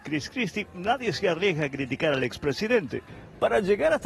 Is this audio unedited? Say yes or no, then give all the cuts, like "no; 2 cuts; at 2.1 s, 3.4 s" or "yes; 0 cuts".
yes; 0 cuts